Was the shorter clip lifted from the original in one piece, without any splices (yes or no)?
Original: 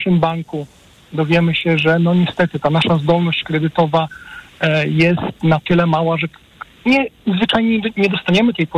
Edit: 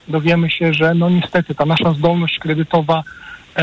yes